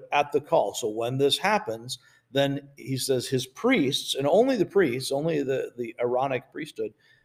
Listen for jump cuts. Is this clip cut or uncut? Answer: uncut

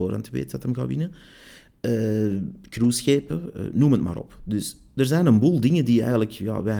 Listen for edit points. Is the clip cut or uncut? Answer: uncut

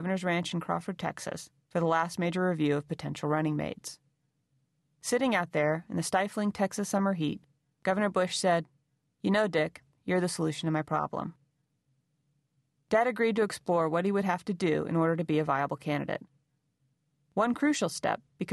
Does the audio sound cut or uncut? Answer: cut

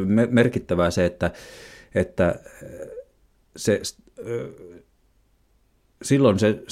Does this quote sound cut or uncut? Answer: uncut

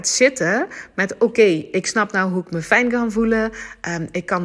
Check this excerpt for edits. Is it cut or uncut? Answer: uncut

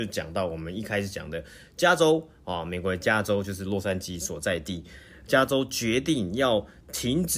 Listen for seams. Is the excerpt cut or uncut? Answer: uncut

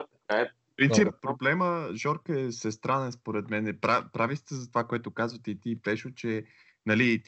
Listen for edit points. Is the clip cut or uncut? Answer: cut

